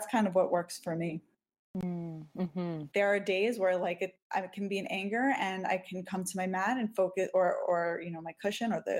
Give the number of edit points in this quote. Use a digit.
1